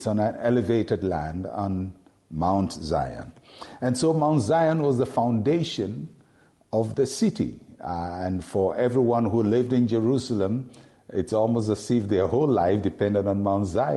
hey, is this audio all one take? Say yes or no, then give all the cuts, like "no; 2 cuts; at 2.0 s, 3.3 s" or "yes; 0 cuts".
yes; 0 cuts